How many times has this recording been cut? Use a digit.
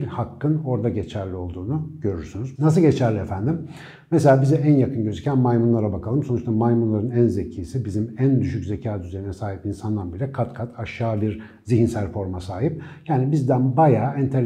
1